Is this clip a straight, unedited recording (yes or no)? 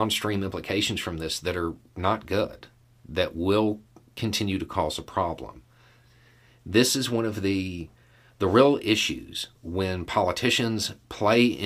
yes